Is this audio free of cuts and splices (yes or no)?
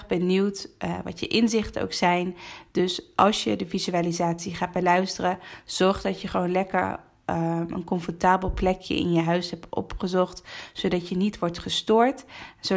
yes